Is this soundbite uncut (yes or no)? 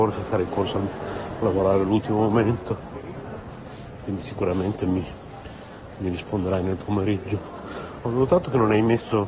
yes